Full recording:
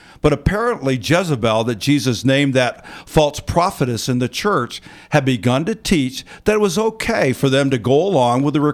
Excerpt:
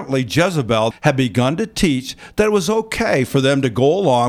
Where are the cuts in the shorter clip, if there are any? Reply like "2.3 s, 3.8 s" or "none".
0.9 s